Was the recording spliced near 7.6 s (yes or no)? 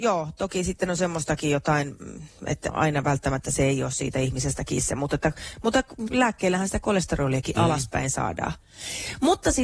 no